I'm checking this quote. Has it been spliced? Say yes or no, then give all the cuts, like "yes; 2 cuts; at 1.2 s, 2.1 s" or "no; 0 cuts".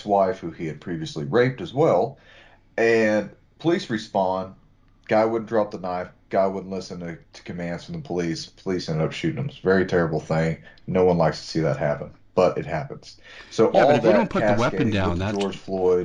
no; 0 cuts